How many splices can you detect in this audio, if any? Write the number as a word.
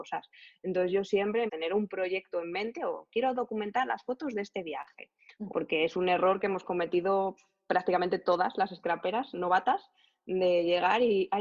two